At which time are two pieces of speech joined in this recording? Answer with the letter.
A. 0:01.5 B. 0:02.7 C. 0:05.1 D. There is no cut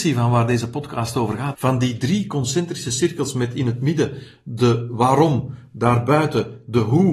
A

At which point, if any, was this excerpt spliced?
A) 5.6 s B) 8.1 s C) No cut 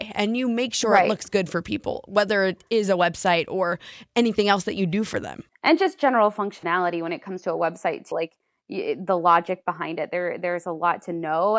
B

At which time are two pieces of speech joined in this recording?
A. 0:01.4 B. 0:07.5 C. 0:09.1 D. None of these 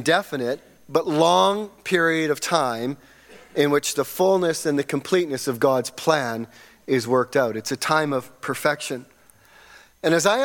D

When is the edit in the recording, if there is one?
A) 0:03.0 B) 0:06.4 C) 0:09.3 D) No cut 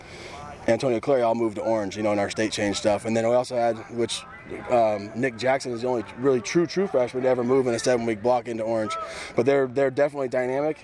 D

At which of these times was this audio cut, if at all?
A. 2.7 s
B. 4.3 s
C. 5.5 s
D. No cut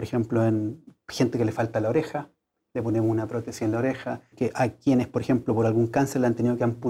B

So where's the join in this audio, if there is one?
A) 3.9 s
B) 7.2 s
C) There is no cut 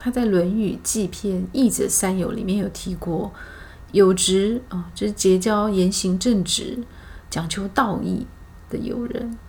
A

